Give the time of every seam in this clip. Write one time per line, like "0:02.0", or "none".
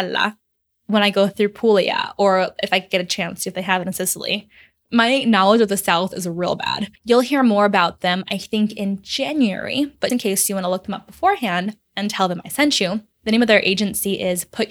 0:07.0
0:10.1
0:13.1